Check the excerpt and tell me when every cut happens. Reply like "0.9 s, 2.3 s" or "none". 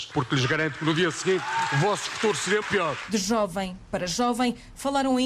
2.6 s